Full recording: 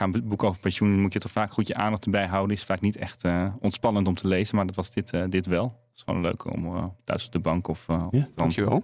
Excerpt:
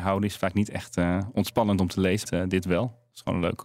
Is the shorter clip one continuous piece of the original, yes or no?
no